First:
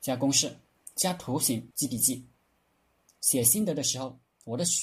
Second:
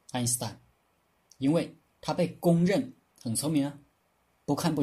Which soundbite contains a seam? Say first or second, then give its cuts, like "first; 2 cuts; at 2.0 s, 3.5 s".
first; 1 cut; at 1.7 s